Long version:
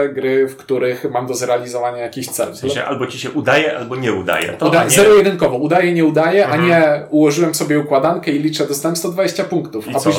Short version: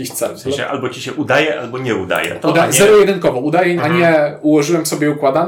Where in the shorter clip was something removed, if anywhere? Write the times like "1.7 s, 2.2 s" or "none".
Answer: 3.8 s